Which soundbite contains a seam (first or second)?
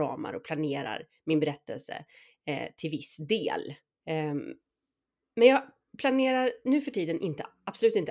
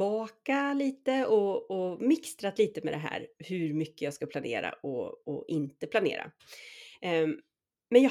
first